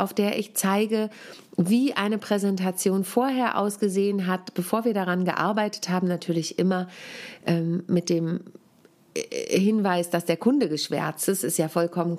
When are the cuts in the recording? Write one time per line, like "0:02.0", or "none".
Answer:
none